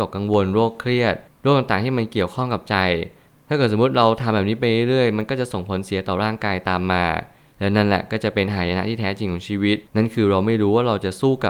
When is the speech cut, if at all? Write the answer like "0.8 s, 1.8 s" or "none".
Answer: 9.9 s